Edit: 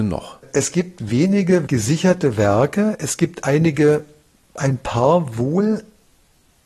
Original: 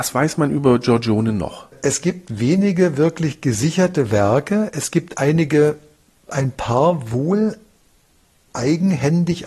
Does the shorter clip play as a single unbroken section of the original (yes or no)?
no